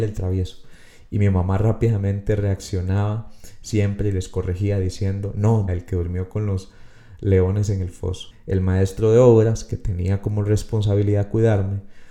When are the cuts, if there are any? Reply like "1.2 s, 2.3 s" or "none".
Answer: 5.7 s, 8.3 s